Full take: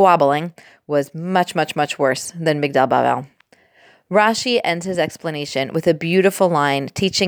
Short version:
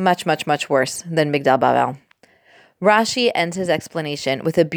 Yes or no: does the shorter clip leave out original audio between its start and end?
no